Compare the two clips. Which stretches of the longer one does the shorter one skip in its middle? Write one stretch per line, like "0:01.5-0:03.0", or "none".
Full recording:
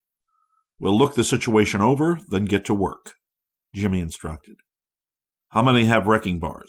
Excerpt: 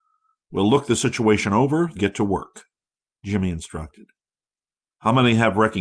0:02.2-0:02.5